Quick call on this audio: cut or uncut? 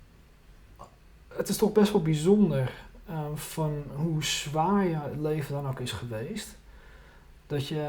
uncut